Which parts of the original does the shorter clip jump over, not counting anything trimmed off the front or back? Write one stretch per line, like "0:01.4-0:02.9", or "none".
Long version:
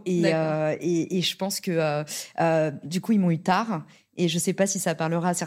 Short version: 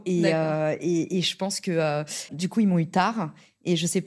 0:02.3-0:02.8